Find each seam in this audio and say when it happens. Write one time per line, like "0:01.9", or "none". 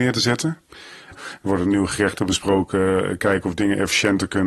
0:01.1